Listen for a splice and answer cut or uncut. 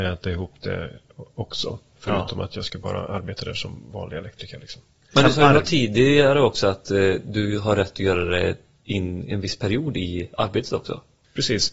uncut